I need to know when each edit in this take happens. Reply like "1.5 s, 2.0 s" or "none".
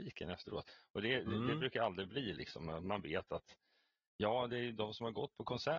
none